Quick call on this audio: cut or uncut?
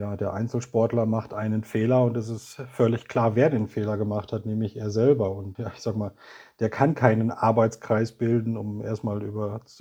cut